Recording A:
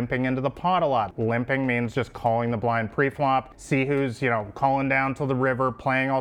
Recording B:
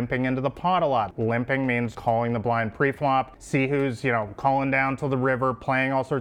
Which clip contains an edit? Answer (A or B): B